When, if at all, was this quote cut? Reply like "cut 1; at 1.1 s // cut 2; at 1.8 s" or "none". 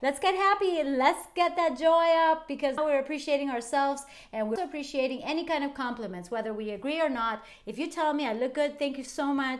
cut 1; at 2.8 s // cut 2; at 4.6 s